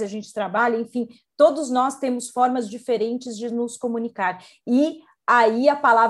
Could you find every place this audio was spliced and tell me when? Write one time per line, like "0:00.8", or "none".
0:04.6